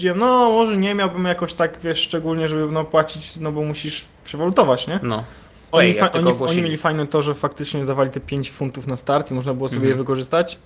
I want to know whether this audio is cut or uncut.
cut